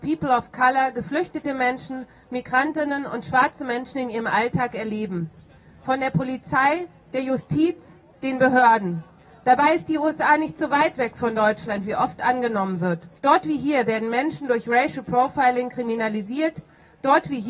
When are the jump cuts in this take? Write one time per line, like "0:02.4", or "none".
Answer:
0:13.2